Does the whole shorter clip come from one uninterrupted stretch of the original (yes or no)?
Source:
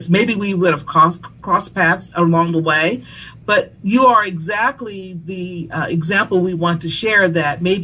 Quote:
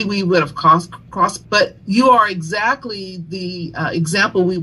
no